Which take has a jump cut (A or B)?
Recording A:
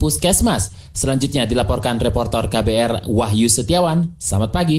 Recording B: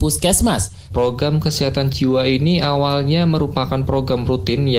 B